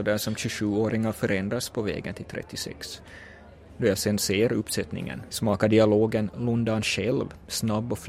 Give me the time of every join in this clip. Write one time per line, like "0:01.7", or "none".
0:03.7
0:05.3